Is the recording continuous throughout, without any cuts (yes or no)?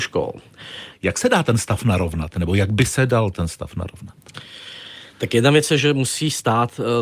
no